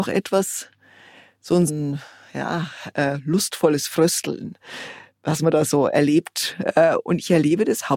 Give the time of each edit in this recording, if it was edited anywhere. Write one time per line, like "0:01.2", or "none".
0:01.7